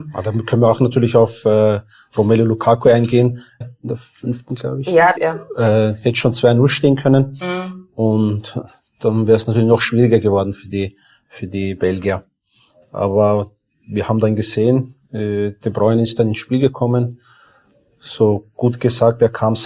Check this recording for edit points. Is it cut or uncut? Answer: cut